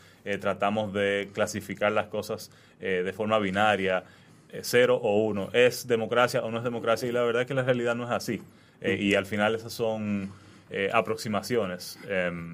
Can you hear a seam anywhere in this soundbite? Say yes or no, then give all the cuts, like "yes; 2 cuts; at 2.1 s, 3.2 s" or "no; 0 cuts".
no; 0 cuts